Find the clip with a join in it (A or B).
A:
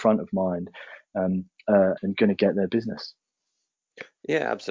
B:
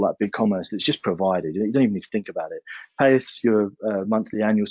A